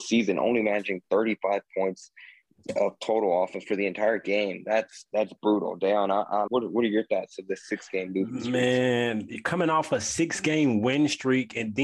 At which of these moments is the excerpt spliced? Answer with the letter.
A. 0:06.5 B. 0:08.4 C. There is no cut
A